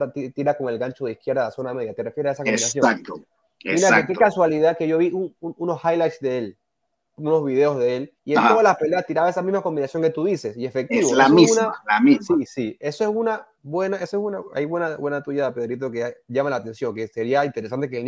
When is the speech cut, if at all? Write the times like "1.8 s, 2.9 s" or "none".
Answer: 8.2 s